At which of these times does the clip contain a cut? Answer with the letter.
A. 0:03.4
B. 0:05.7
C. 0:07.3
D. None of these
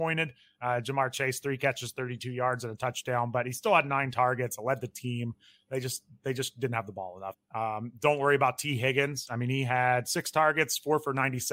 C